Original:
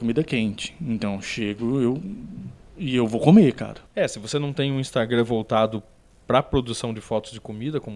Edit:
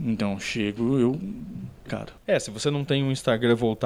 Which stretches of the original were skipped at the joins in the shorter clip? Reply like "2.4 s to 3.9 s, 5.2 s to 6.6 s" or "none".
2.7 s to 3.5 s